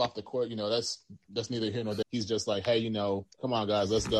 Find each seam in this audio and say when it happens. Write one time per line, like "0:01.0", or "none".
0:02.0